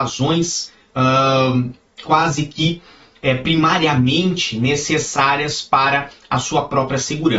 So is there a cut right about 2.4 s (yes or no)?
no